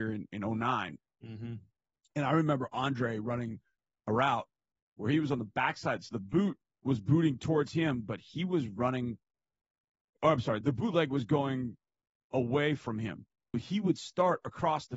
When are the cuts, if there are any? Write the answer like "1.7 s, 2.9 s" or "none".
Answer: 10.6 s, 13.5 s